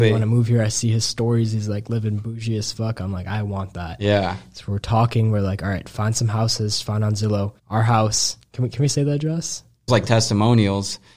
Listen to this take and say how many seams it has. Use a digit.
2